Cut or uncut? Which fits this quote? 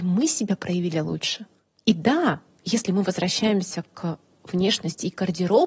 uncut